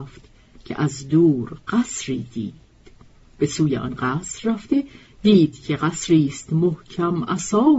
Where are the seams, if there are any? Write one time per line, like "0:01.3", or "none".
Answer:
none